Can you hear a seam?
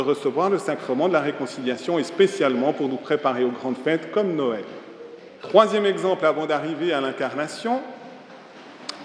yes; 1 cut; at 5.4 s

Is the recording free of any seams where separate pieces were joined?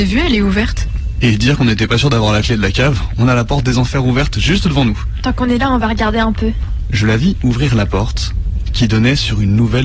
yes; 0 cuts

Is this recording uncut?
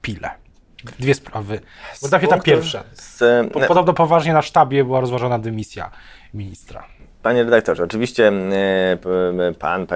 yes; 0 cuts

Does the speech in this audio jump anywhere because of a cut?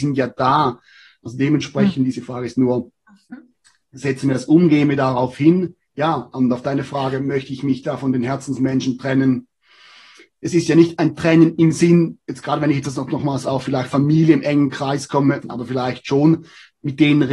yes; 2 cuts; at 2.1 s, 15.4 s

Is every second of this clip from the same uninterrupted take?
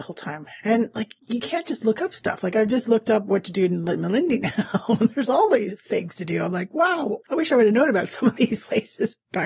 yes; 0 cuts

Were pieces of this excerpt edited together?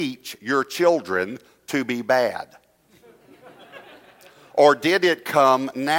no; 0 cuts

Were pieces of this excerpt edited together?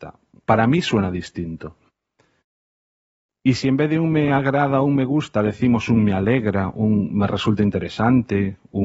no; 0 cuts

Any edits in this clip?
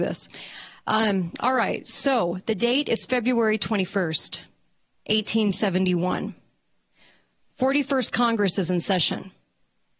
no; 0 cuts

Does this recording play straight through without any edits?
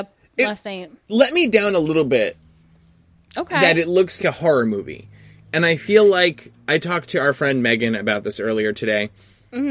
no; 1 cut; at 4.2 s

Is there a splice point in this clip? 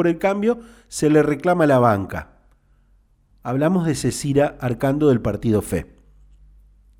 no; 0 cuts

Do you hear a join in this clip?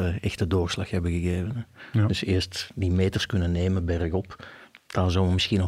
no; 0 cuts

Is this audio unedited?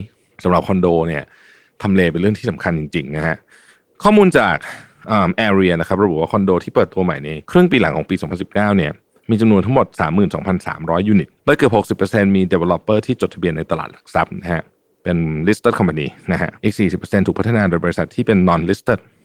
no; 3 cuts; at 7.4 s, 11.4 s, 16.6 s

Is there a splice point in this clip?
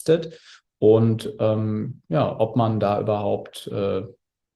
no; 0 cuts

